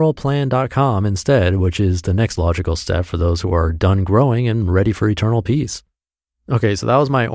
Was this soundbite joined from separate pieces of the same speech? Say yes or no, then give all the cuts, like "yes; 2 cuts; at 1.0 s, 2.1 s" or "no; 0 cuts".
no; 0 cuts